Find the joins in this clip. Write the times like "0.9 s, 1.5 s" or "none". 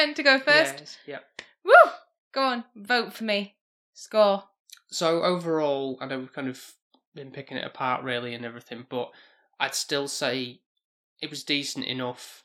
none